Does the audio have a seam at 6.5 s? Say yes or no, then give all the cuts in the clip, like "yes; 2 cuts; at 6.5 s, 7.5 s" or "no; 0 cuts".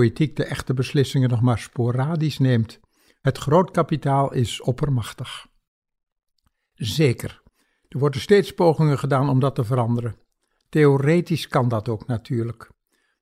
no; 0 cuts